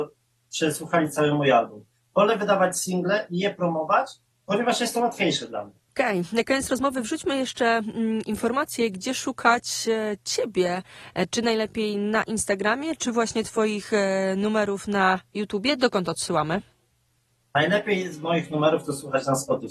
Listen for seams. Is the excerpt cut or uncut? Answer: uncut